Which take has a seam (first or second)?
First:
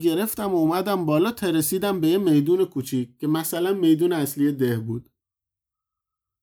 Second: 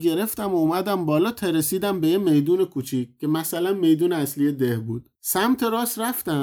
second